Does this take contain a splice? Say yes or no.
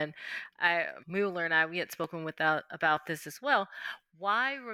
yes